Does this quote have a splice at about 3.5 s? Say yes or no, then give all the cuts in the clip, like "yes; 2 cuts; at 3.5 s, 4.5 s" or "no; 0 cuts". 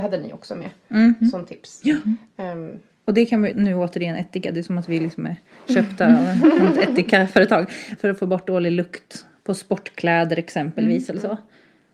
yes; 2 cuts; at 3.5 s, 8.0 s